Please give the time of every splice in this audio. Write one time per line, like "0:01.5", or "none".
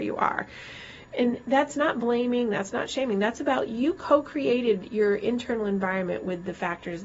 none